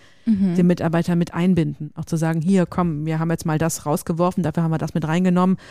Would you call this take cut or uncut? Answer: uncut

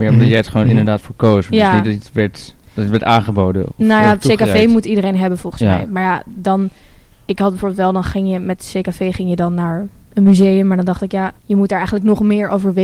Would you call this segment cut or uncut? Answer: cut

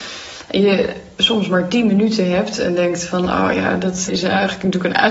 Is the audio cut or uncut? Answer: cut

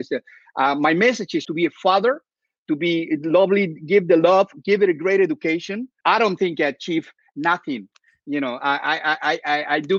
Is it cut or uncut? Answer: cut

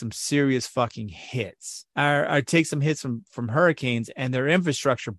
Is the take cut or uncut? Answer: cut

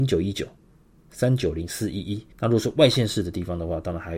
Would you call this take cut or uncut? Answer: cut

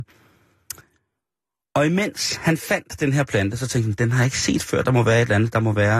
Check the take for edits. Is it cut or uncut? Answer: uncut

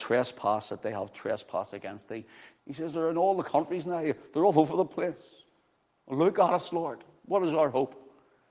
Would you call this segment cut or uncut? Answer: cut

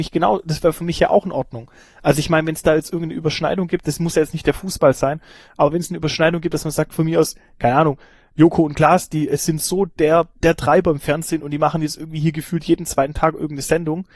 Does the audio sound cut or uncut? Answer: uncut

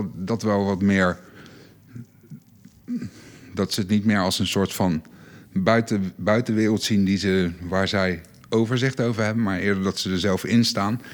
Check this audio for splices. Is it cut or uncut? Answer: uncut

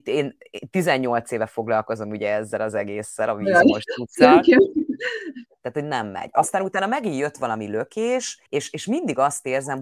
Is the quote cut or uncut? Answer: cut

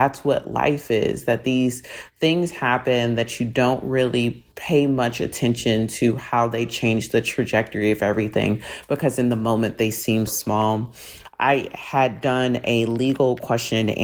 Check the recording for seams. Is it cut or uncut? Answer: cut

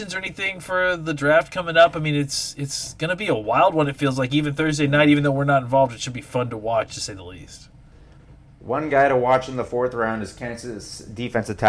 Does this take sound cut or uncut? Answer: uncut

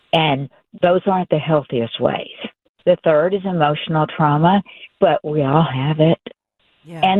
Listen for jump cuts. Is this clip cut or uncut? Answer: cut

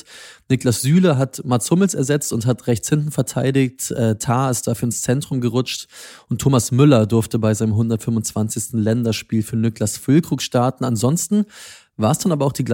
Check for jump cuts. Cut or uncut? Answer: uncut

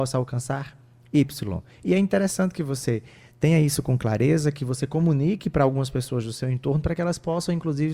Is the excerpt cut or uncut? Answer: uncut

